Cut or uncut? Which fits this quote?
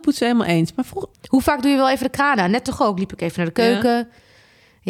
cut